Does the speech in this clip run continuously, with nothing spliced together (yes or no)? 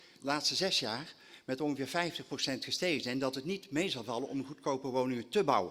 yes